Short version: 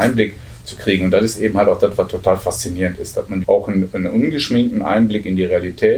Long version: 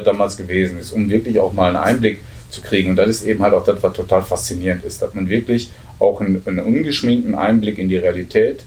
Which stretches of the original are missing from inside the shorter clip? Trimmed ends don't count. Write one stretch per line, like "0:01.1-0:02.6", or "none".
0:05.3-0:06.0